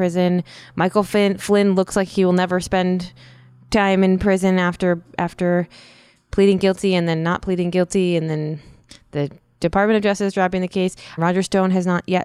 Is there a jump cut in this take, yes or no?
yes